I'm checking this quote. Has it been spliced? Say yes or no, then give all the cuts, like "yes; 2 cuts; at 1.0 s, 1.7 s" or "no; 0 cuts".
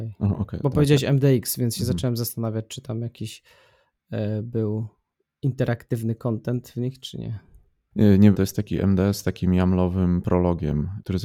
yes; 1 cut; at 8.3 s